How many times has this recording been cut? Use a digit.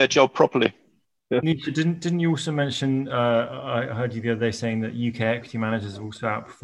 0